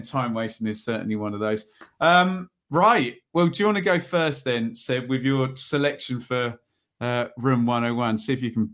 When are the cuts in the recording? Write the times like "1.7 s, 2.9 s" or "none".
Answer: none